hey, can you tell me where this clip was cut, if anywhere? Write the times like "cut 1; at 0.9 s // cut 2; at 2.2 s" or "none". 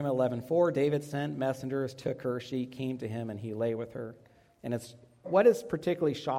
cut 1; at 5.2 s